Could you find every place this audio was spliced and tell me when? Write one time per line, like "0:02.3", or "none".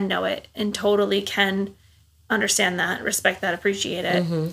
none